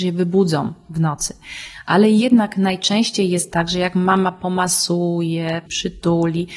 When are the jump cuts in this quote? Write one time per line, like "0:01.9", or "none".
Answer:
0:05.7